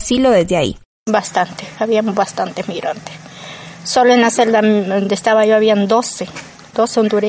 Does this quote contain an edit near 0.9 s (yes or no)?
no